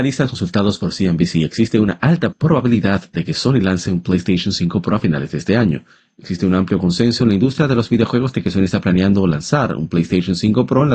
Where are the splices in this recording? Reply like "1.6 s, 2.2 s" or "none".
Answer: 2.3 s